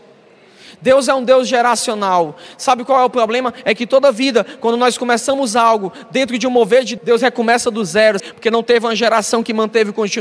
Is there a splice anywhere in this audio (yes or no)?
yes